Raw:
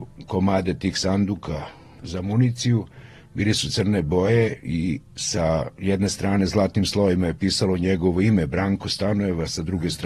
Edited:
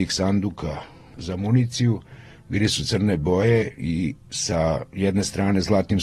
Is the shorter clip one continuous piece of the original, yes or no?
yes